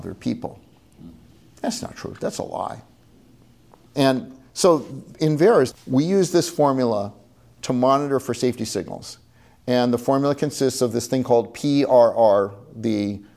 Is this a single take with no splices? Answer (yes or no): no